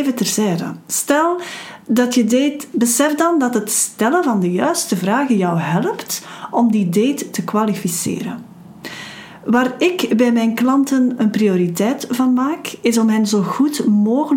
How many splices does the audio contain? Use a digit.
1